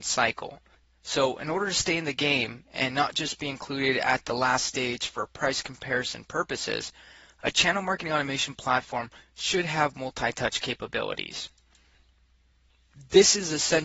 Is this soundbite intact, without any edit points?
yes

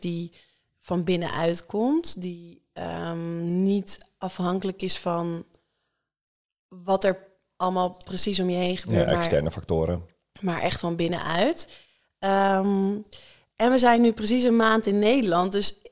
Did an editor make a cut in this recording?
no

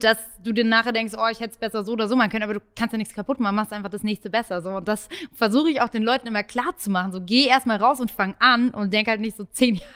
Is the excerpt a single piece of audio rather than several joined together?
yes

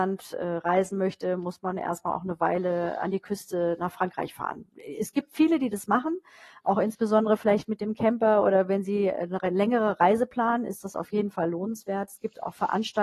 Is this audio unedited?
yes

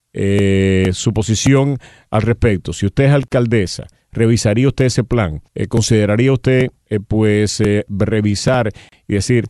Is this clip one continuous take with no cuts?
no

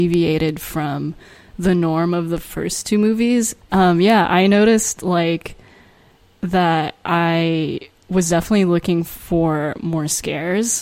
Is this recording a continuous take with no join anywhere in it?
no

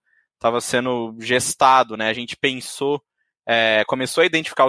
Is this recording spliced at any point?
no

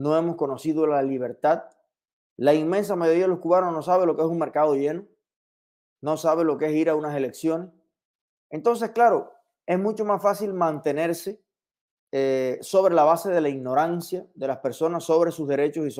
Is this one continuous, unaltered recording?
yes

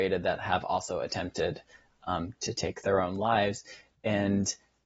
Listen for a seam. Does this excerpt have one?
no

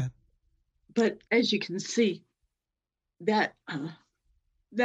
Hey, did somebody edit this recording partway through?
yes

